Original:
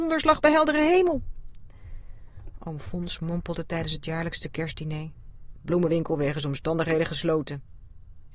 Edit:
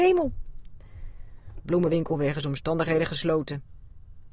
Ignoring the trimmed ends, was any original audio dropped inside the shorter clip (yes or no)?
yes